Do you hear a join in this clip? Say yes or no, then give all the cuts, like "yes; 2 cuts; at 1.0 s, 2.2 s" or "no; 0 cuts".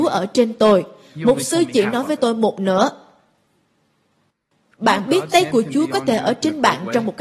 no; 0 cuts